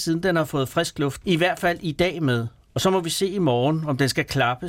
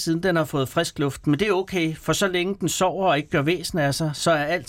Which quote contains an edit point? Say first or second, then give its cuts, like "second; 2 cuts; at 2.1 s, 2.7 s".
first; 1 cut; at 1.2 s